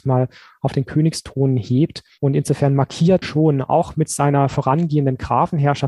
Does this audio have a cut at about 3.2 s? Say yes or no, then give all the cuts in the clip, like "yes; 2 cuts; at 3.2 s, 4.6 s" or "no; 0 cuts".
yes; 1 cut; at 3.2 s